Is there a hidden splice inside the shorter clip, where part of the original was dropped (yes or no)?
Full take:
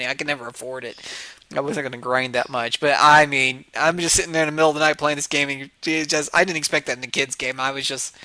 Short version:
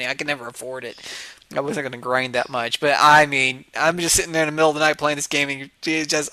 no